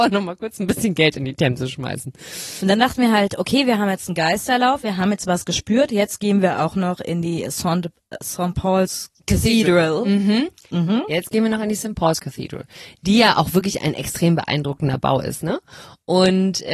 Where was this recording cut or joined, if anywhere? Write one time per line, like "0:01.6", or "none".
none